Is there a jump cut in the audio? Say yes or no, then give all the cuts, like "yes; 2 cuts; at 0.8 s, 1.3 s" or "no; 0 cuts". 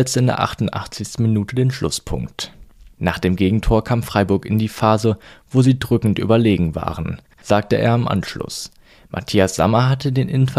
yes; 1 cut; at 2.9 s